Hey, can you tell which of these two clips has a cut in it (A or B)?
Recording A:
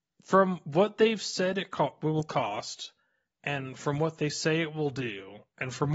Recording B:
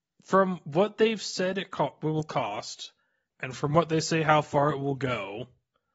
B